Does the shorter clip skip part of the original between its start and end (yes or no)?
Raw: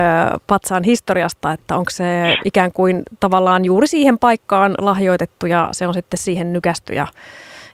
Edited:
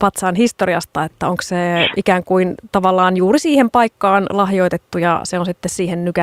no